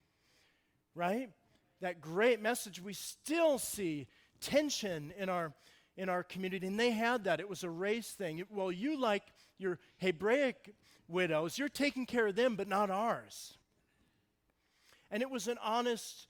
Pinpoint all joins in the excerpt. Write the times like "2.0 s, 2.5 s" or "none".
none